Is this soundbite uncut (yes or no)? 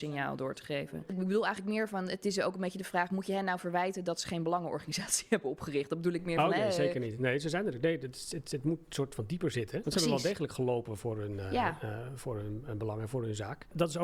yes